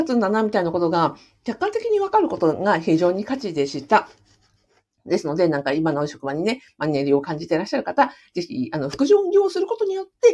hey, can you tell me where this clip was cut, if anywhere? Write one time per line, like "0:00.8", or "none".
none